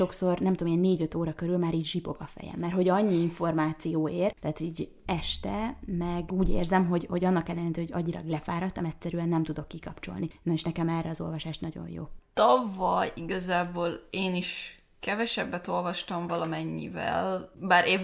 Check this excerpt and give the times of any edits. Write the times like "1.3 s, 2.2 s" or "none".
12.2 s